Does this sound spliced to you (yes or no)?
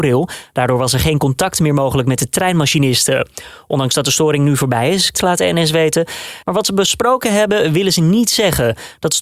yes